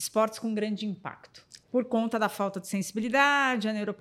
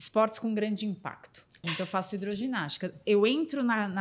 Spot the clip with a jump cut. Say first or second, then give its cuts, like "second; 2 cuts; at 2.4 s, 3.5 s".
second; 1 cut; at 1.6 s